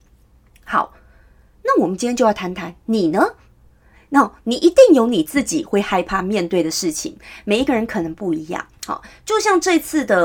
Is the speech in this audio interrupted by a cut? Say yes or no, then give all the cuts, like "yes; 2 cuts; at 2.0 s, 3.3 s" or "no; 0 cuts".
no; 0 cuts